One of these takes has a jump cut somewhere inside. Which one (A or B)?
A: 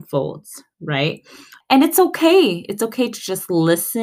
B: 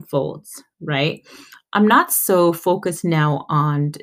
A